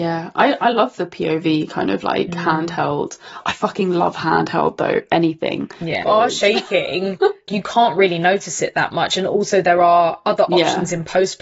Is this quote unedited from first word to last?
no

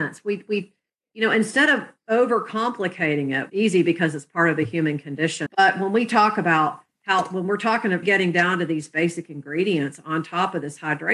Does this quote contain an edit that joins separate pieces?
yes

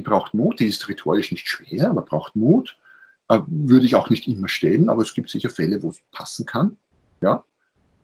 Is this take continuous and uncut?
yes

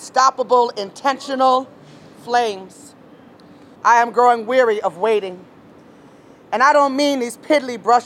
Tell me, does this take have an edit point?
yes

